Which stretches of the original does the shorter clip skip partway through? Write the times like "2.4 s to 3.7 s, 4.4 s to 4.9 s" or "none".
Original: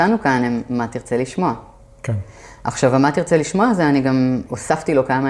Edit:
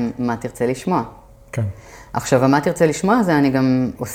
none